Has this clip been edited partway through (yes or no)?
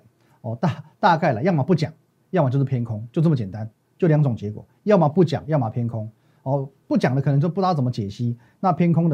no